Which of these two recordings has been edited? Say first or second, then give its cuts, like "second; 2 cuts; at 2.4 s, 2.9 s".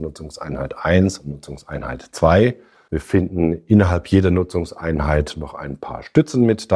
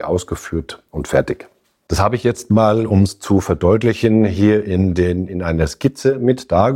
first; 1 cut; at 2.8 s